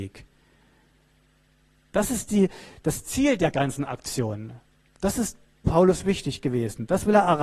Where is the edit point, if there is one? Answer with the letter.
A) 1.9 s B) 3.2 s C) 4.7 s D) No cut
A